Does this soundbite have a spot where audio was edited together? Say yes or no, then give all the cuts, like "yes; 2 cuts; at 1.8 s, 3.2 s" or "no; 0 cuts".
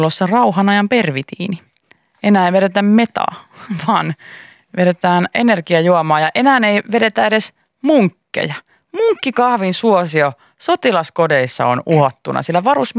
yes; 1 cut; at 5.3 s